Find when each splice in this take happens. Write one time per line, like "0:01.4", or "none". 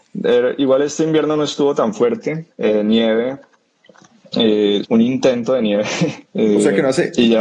0:02.5
0:04.8
0:06.2

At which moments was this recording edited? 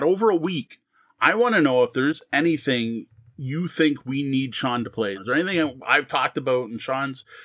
0:05.1

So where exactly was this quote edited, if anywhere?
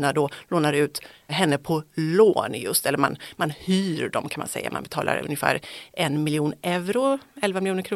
none

